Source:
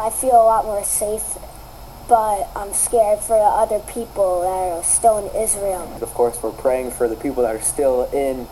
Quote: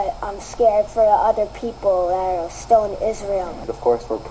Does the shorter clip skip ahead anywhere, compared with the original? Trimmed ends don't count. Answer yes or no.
no